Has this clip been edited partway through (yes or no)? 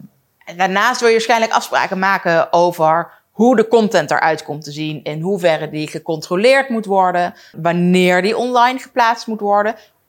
yes